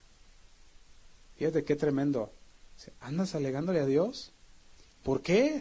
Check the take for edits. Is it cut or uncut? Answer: cut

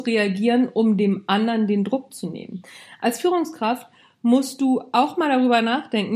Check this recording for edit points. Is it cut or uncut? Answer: uncut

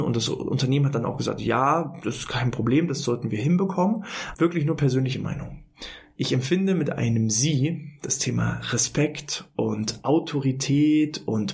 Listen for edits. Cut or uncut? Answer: cut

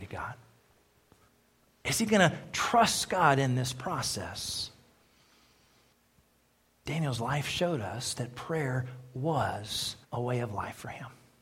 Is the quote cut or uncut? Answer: cut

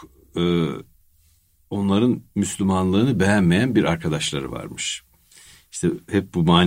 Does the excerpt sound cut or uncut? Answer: uncut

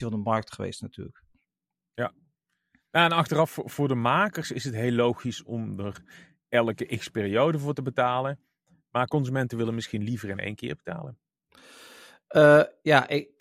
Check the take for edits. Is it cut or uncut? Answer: uncut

